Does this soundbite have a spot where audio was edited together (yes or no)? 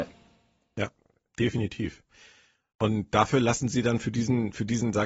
no